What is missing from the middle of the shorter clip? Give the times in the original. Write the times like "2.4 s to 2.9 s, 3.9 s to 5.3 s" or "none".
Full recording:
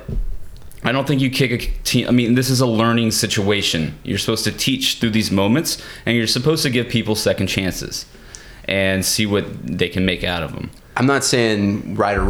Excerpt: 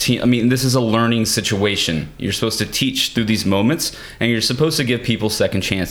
none